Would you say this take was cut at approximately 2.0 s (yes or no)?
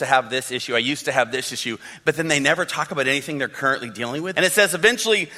no